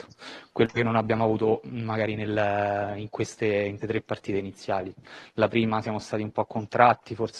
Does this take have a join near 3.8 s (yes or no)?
yes